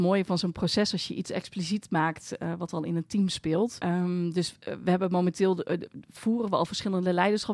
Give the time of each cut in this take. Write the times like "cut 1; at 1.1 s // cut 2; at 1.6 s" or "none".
cut 1; at 3.8 s